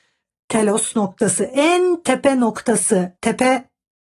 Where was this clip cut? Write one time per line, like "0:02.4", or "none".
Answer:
0:03.2